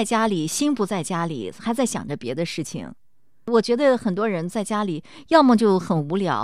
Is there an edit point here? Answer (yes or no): no